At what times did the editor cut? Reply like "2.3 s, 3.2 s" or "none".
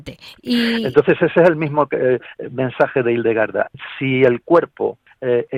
none

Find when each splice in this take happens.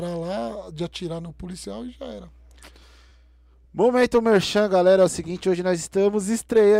none

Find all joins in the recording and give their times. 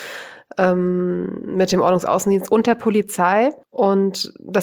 3.6 s

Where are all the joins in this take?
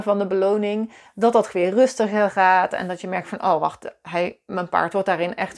none

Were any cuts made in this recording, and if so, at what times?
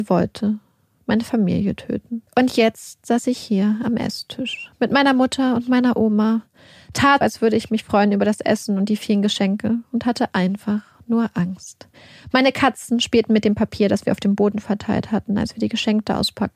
2.3 s, 7.2 s

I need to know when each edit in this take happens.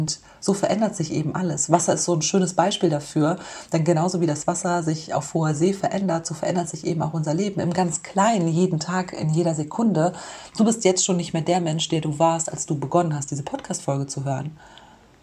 none

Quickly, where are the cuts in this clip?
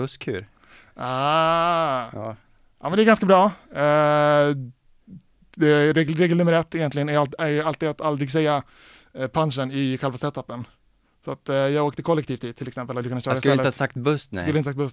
none

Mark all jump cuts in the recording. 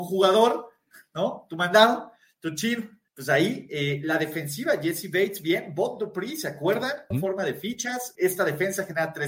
3.1 s, 7.1 s, 8.1 s

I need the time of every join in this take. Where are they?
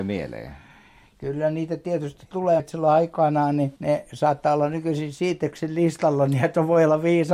2.6 s, 3.8 s

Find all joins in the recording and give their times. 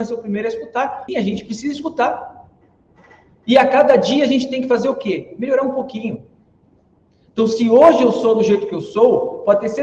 1.1 s

